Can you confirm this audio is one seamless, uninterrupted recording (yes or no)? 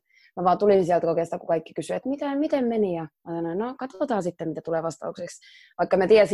no